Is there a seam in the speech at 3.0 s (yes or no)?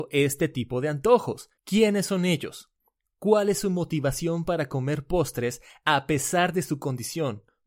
no